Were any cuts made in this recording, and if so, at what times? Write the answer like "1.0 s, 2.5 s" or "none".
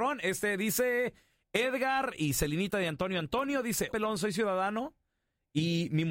3.9 s